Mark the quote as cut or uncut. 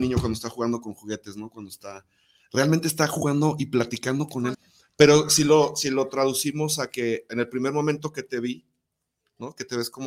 cut